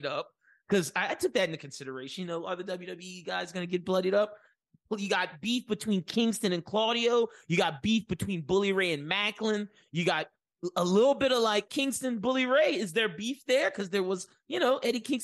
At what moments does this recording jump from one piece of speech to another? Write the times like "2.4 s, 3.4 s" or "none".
11.7 s